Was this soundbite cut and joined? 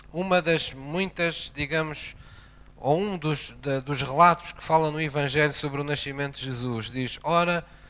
no; 0 cuts

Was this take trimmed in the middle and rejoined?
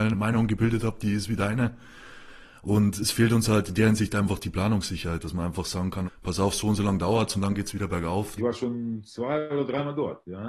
yes; 2 cuts; at 6.0 s, 8.4 s

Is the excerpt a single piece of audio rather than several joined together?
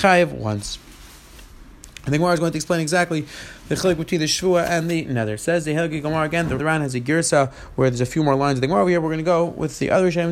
no; 1 cut; at 6.6 s

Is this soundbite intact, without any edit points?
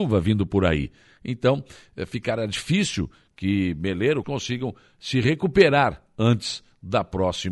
no; 1 cut; at 4.2 s

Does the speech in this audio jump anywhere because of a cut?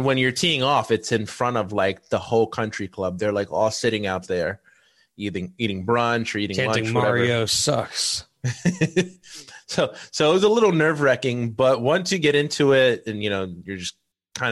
no; 0 cuts

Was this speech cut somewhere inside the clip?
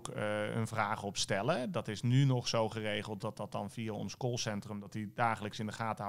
no; 0 cuts

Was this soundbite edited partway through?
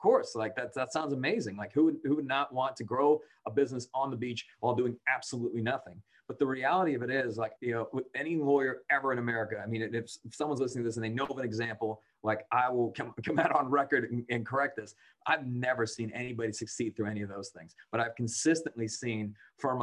yes; 1 cut; at 7.6 s

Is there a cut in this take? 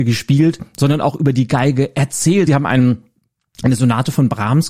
yes; 1 cut; at 2.5 s

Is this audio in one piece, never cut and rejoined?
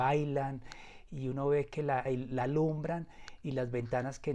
no; 1 cut; at 2.1 s

